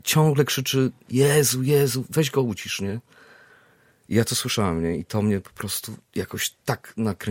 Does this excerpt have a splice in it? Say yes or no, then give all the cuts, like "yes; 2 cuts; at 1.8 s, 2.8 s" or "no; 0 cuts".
no; 0 cuts